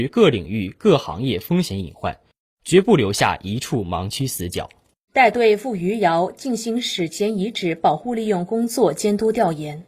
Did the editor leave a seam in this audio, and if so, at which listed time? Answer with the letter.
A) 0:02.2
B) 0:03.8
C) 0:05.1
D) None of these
C